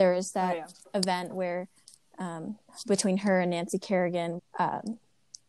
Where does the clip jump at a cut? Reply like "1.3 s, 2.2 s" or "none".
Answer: 4.4 s